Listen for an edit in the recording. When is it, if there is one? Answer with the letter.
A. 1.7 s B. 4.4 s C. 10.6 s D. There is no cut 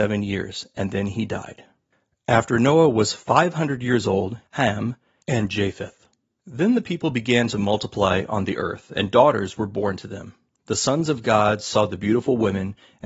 B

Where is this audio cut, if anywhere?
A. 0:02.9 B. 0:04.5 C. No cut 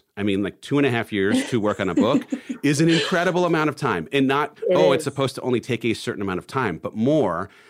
B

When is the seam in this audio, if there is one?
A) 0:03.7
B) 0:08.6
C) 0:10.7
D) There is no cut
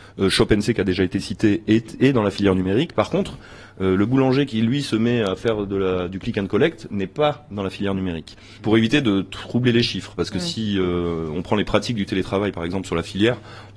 B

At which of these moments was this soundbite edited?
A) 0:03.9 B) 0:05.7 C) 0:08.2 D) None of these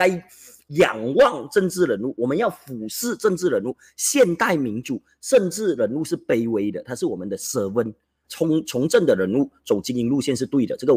C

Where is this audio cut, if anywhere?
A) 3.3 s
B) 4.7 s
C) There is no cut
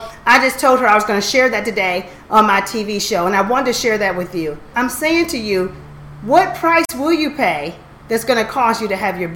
B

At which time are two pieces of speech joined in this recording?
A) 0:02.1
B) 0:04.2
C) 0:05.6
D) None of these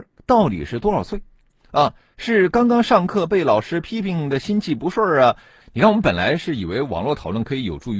C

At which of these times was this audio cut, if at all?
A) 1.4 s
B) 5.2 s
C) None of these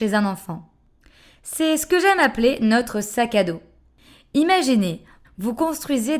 B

